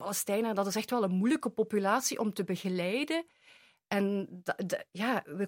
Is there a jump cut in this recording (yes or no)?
no